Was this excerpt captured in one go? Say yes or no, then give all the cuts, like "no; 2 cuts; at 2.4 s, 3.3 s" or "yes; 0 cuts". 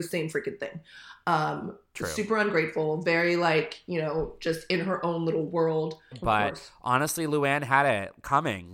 no; 1 cut; at 6.1 s